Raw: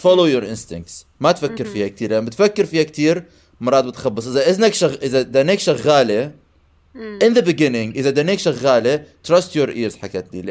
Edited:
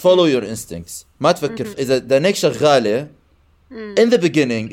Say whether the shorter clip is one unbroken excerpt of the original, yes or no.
no